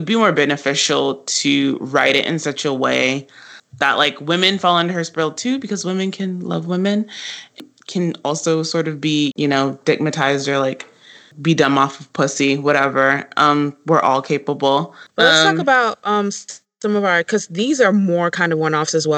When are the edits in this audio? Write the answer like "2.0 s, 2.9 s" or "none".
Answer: 9.3 s, 15.1 s